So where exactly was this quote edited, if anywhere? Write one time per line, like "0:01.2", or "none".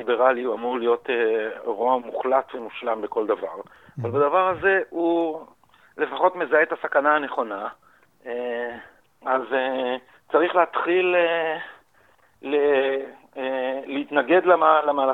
0:09.0